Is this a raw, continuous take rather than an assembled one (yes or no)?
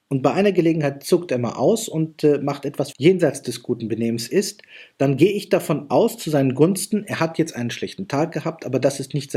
no